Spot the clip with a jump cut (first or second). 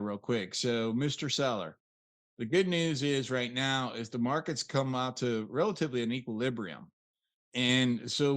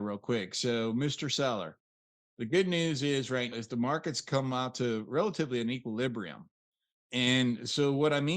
second